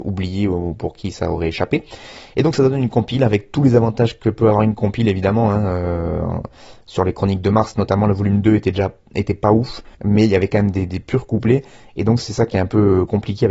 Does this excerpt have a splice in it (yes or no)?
yes